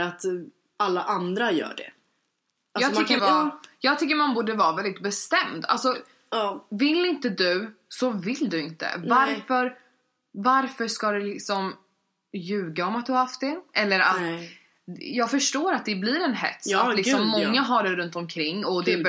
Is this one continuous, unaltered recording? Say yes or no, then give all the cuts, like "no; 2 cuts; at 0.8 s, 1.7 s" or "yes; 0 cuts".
no; 1 cut; at 3.2 s